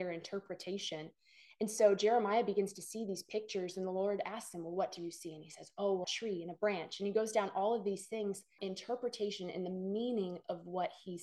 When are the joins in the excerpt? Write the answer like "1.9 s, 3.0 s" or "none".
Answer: 6.0 s, 8.6 s

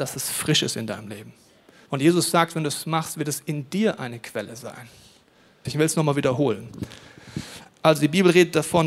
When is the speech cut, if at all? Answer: 1.9 s, 5.6 s, 7.7 s

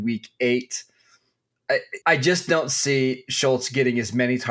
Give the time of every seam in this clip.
2.0 s

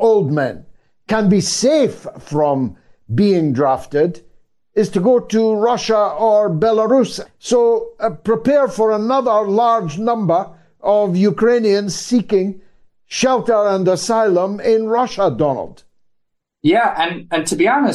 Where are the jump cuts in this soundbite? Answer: 7.2 s

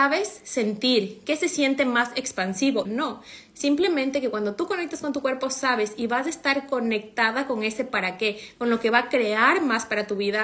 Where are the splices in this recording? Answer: 2.8 s

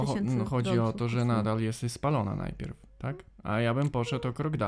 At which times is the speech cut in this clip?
none

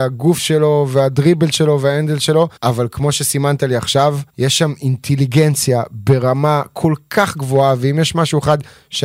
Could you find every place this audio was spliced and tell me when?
2.6 s, 4.3 s

